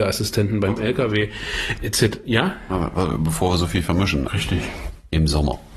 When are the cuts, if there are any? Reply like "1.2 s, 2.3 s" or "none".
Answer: 4.3 s